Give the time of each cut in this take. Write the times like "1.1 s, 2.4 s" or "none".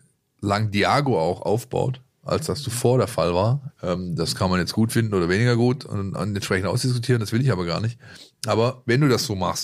3.7 s